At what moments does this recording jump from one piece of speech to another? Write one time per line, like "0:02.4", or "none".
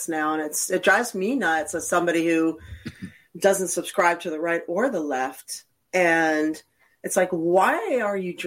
none